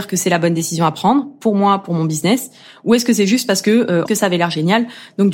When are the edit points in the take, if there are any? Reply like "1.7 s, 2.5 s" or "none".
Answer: 4.1 s